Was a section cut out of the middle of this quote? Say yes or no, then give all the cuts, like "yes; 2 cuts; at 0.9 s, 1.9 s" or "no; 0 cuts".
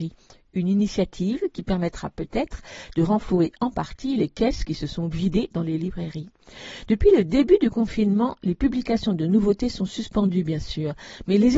no; 0 cuts